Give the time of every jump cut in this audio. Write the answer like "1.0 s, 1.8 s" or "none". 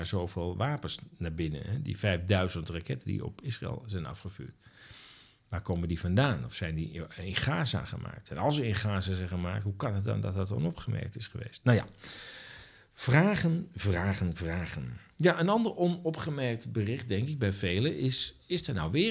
none